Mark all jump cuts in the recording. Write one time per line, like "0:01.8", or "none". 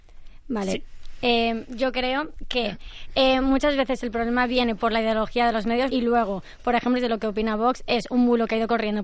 0:05.9
0:07.0